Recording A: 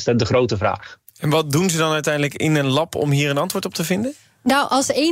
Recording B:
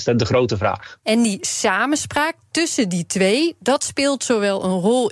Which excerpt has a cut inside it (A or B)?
B